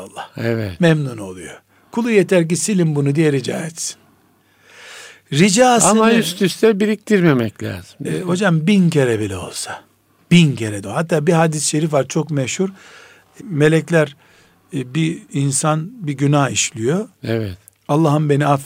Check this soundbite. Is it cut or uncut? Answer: cut